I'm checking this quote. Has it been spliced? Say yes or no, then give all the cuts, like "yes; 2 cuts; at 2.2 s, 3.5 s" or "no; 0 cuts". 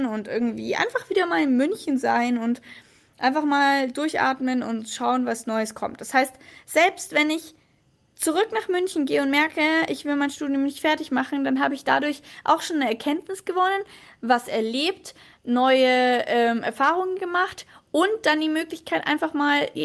no; 0 cuts